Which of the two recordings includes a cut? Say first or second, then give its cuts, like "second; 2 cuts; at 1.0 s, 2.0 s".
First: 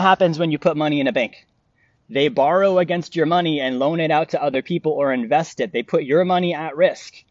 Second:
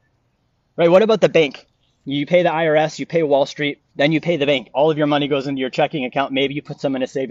second; 1 cut; at 3.9 s